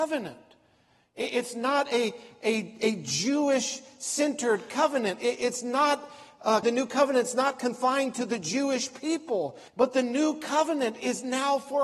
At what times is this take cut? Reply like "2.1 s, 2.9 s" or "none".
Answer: 6.6 s, 9.7 s